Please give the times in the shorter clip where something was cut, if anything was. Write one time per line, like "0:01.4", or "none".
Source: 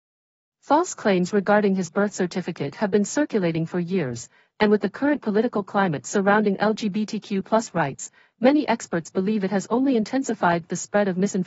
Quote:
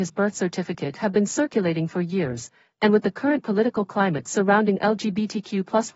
none